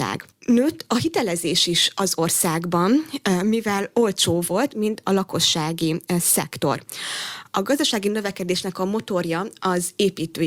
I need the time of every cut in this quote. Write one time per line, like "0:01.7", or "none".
0:04.7